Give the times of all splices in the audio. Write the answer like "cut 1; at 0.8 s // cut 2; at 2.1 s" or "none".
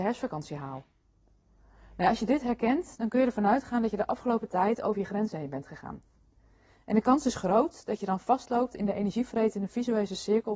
none